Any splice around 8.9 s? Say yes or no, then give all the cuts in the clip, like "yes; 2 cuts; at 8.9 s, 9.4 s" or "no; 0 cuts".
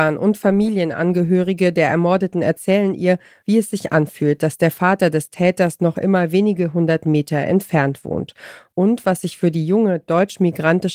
no; 1 cut; at 3.4 s